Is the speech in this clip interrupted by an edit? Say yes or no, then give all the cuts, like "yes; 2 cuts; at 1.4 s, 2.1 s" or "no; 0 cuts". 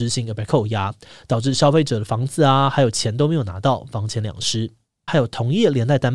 yes; 1 cut; at 5.1 s